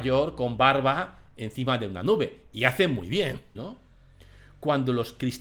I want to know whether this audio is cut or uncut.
cut